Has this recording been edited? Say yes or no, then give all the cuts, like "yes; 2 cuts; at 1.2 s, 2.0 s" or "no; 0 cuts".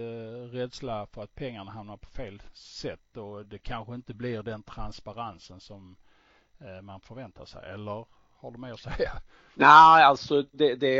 no; 0 cuts